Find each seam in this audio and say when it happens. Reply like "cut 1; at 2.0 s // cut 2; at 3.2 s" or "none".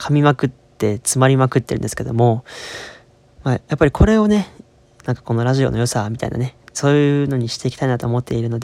cut 1; at 5.0 s // cut 2; at 6.6 s